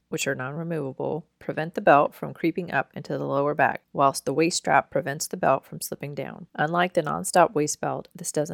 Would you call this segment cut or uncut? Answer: cut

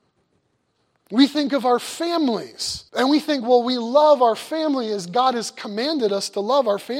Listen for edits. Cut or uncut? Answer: cut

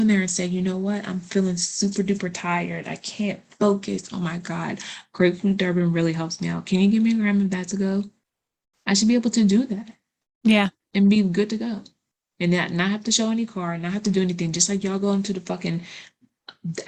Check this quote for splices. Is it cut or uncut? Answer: uncut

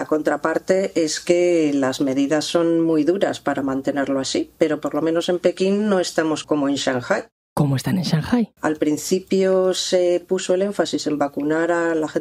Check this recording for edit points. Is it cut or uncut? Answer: cut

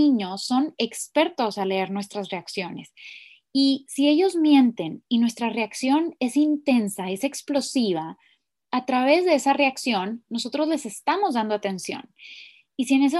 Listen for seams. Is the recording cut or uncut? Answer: uncut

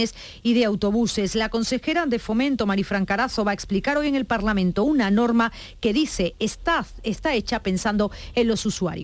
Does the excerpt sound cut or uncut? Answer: uncut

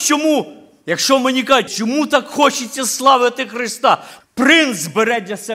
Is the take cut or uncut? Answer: cut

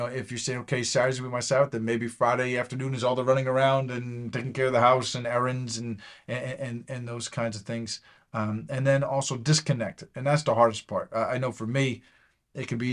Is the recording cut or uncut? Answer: uncut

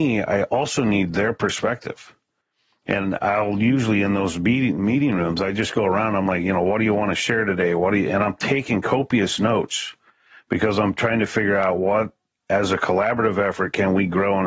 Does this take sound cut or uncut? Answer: uncut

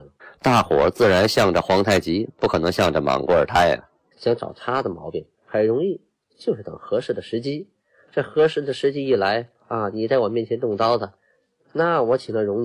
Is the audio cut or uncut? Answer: cut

